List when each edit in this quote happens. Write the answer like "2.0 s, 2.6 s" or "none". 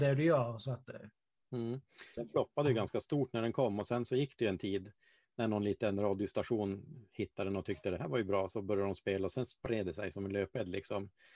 2.2 s